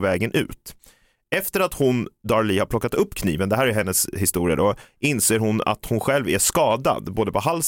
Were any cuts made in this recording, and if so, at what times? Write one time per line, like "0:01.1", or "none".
none